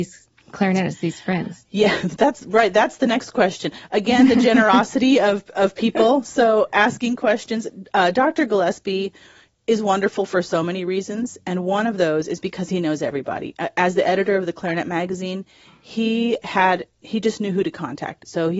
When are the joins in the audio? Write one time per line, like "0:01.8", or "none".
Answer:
none